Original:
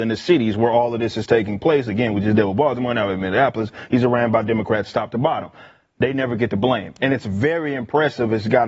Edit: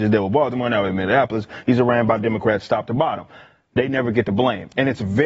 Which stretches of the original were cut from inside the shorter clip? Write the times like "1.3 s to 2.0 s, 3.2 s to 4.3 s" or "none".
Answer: none

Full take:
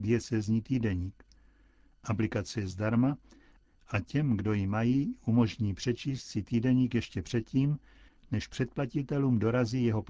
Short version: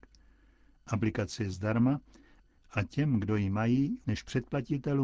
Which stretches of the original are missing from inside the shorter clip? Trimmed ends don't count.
5.2 s to 8.3 s

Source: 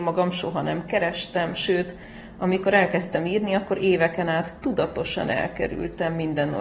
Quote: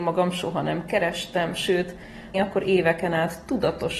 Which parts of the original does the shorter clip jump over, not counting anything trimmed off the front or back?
2.3 s to 3.5 s

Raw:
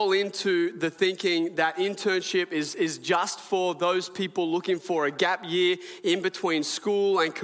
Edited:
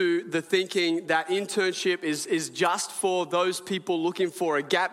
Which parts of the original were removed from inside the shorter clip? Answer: none

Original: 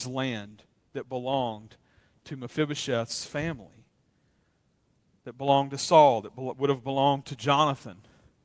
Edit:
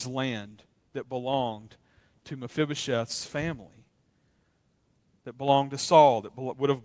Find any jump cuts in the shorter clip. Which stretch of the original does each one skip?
none

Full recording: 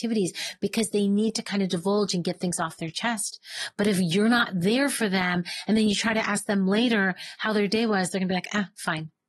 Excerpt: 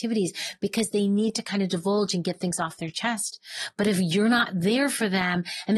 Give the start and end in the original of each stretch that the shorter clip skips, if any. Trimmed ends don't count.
none

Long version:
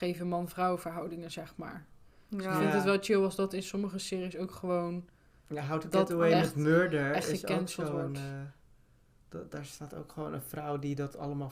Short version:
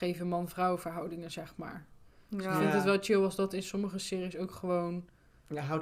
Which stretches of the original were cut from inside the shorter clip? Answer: none

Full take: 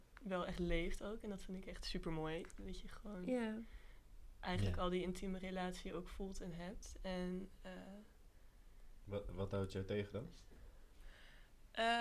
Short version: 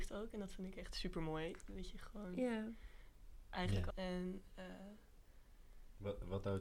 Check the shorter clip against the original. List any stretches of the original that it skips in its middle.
4.8 s to 7.0 s

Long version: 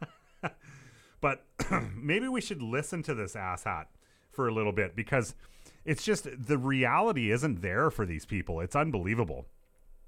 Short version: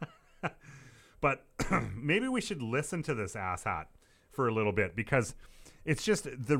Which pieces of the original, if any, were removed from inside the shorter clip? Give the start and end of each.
none

